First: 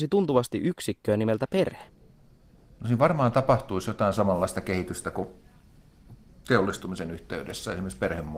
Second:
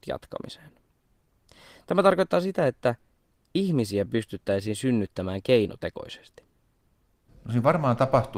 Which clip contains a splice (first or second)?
second